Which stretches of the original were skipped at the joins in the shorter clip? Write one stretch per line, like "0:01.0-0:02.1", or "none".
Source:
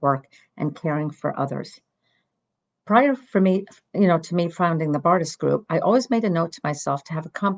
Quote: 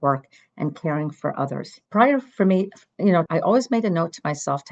0:01.9-0:02.8
0:04.2-0:05.6